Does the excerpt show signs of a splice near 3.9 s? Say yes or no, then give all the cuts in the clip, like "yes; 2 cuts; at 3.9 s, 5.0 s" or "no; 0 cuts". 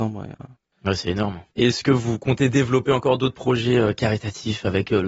no; 1 cut; at 1.5 s